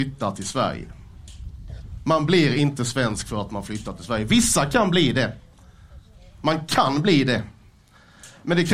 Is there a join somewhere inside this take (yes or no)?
no